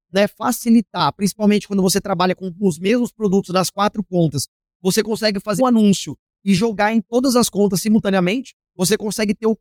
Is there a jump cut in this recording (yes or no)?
yes